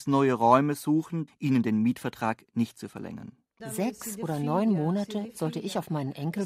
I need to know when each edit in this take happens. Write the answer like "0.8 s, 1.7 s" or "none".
1.3 s, 3.6 s